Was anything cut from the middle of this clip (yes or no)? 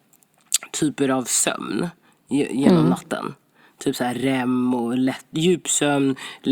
no